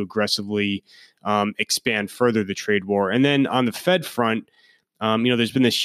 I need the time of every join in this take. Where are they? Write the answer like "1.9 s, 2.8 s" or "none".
none

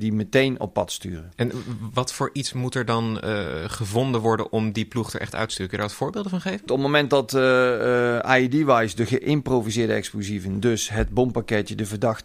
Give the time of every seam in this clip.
6.7 s

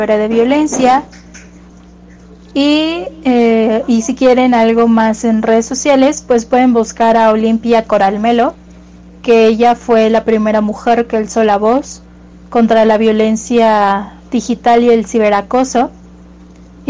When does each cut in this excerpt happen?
none

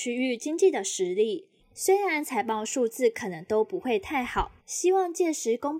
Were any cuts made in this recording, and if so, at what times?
1.6 s, 4.6 s

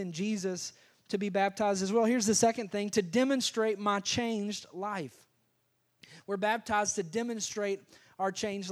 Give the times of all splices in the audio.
none

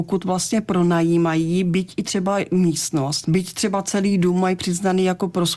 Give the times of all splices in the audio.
3.2 s

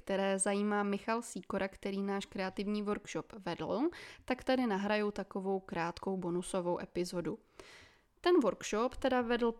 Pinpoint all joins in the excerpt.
none

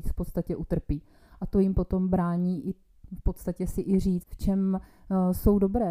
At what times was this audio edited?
4.2 s

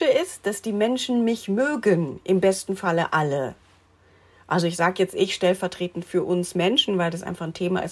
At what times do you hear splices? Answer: none

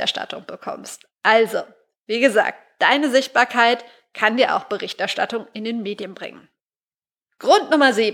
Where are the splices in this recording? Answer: none

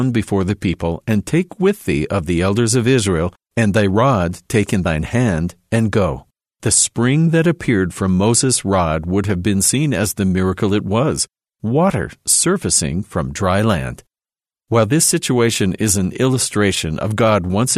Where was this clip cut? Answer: 6.4 s

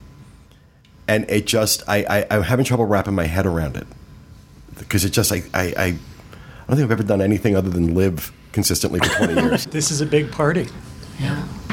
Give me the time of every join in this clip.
9.6 s

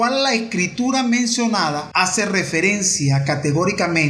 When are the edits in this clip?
none

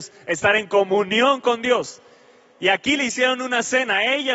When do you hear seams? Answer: none

